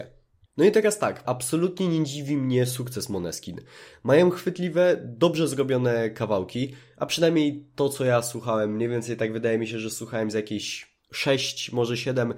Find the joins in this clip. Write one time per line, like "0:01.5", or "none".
0:01.2
0:11.0